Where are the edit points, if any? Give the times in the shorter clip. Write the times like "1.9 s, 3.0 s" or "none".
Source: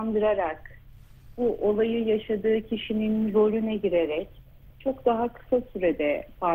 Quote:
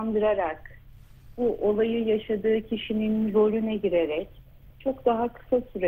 none